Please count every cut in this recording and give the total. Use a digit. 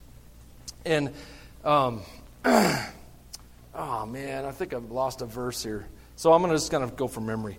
0